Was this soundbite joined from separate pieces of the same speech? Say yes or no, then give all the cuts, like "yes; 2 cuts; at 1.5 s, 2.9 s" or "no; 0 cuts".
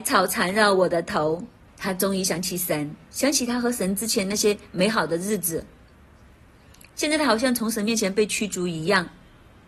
yes; 2 cuts; at 1.7 s, 3.0 s